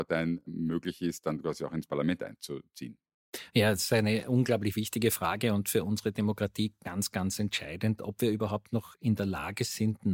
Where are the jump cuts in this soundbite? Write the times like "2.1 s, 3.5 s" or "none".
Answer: none